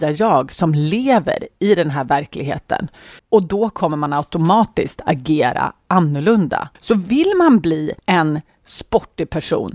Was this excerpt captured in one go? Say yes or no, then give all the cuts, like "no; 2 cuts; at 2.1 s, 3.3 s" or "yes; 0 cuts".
no; 3 cuts; at 3.2 s, 6.7 s, 8.0 s